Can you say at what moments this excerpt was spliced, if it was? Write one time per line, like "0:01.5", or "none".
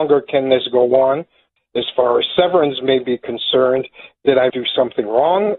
0:01.6
0:04.5